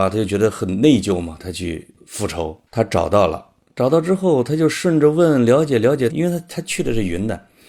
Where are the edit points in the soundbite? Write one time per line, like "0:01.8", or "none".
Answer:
0:01.4
0:02.7
0:06.1